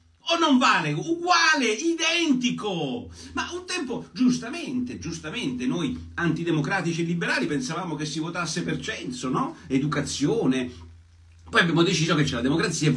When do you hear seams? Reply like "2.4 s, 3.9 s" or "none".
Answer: none